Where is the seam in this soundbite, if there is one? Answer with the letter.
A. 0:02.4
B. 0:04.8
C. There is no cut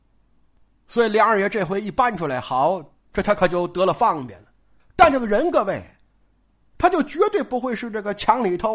B